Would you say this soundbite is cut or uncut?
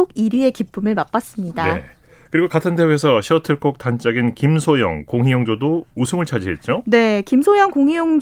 uncut